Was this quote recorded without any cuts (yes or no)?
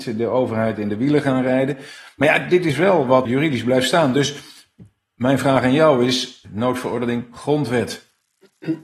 no